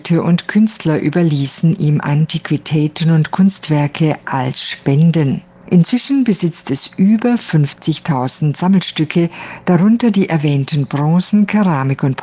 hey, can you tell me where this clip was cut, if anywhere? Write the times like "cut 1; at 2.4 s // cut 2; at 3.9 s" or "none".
cut 1; at 5.7 s